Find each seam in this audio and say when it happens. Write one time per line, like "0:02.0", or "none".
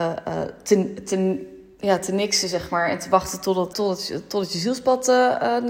0:03.7